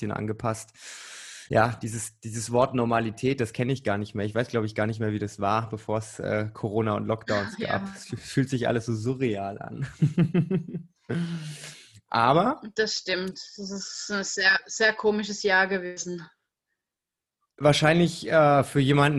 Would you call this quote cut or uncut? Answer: uncut